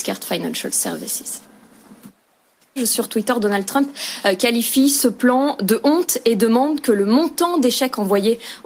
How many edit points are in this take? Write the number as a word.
one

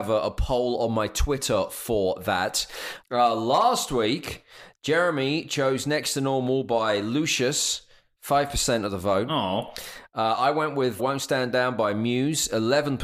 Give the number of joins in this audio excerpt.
two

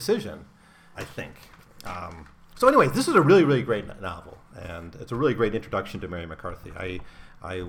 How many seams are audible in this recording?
one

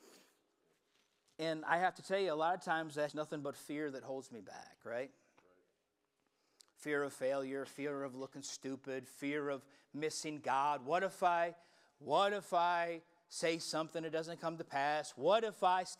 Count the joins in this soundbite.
one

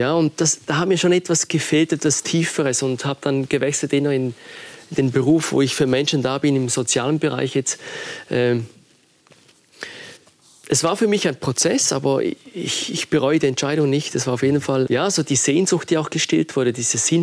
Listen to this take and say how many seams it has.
one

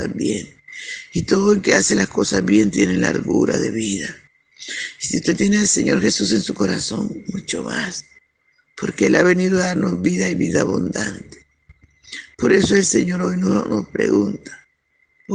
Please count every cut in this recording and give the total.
zero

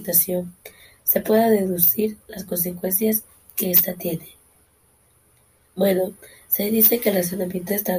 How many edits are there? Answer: one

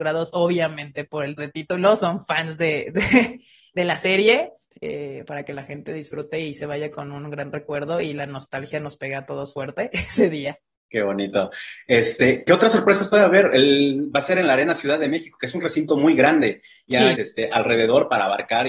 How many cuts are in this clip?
three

